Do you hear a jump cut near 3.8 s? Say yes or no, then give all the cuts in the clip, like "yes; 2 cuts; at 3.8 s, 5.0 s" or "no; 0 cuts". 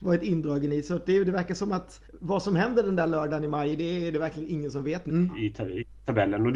no; 2 cuts; at 2.0 s, 5.1 s